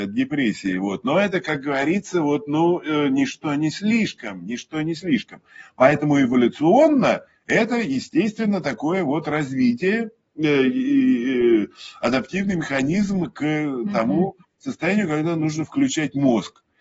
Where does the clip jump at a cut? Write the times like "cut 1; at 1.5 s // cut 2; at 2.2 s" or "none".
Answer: none